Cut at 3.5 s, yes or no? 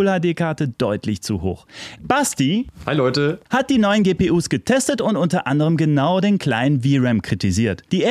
no